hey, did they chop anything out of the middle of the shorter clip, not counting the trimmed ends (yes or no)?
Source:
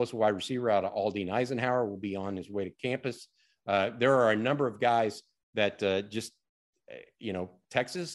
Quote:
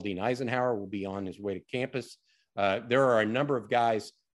no